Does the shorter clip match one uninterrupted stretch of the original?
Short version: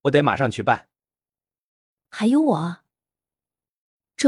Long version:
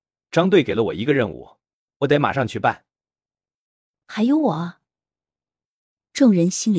yes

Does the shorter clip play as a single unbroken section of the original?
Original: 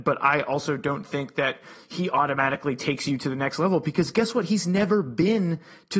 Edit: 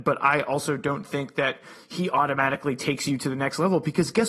yes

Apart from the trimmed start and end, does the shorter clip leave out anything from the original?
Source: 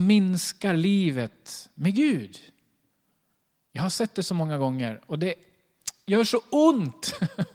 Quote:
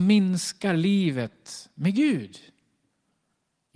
no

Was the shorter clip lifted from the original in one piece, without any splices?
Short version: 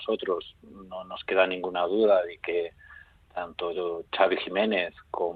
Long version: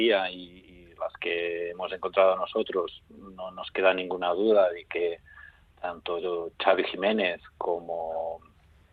yes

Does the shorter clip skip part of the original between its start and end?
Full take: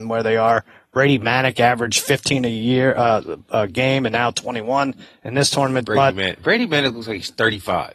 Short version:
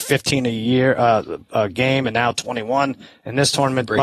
no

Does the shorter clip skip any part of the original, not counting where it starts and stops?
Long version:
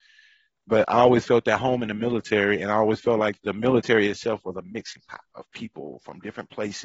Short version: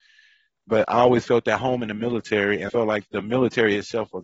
yes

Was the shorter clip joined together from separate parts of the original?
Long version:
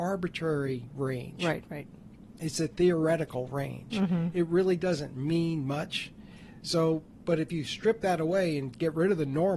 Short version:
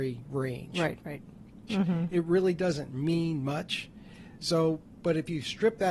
yes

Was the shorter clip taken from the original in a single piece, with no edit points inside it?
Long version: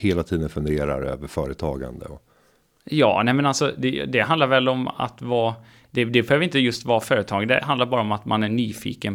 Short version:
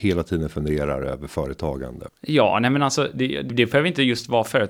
no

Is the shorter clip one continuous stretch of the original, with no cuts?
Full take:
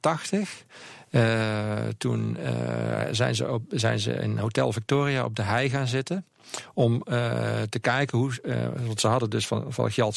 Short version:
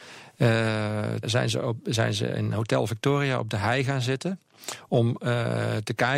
no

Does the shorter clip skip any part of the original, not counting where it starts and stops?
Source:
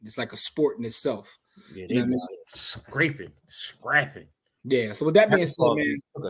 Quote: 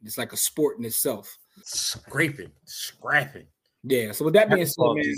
yes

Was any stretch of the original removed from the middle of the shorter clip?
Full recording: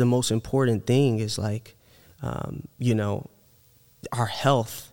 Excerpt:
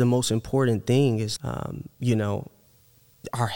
yes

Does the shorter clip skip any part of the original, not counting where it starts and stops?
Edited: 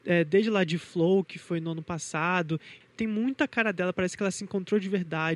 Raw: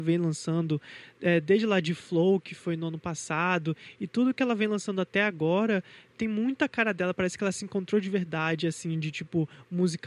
yes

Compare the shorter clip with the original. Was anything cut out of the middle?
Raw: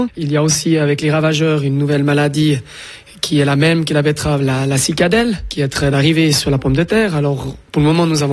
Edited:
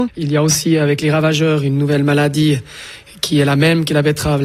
no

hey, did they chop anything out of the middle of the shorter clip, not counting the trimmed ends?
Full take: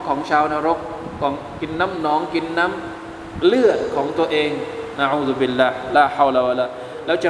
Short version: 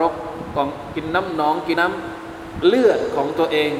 yes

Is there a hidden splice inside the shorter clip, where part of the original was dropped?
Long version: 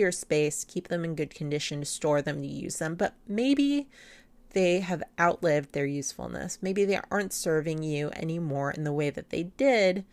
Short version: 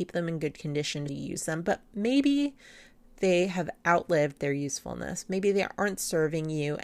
yes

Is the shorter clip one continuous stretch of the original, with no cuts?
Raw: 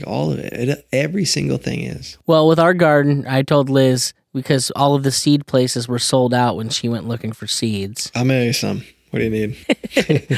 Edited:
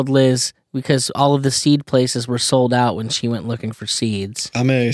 yes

